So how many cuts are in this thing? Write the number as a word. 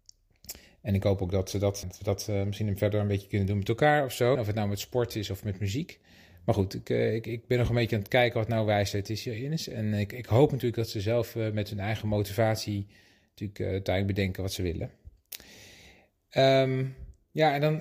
two